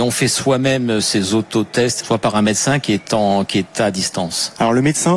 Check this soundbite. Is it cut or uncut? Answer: cut